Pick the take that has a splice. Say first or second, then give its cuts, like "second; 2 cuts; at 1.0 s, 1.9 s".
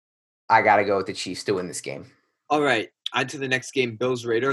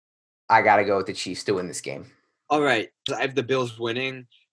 second; 1 cut; at 3.1 s